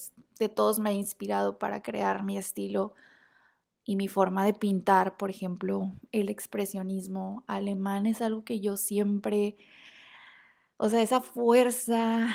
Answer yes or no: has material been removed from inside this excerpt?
no